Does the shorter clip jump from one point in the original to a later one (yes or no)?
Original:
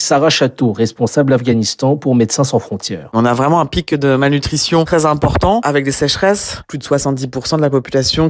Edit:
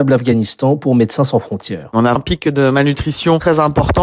yes